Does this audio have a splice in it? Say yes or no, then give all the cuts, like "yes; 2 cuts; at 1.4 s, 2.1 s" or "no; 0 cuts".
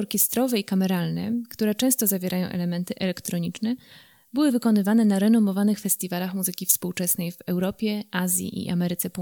no; 0 cuts